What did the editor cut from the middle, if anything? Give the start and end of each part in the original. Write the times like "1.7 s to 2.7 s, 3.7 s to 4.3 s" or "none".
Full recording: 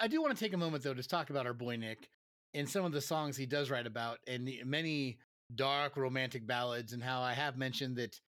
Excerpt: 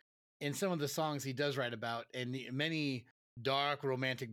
none